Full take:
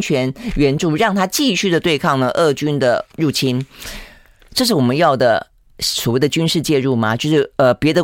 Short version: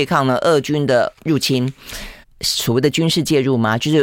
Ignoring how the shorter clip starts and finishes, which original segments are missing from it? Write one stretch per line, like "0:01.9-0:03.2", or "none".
0:04.1-0:05.6